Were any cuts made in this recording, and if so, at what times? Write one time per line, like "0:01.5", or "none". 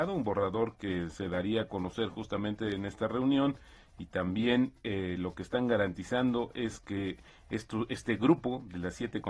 none